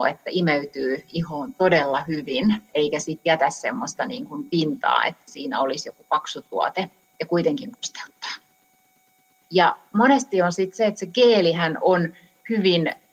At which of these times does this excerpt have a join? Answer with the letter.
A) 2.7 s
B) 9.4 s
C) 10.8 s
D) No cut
B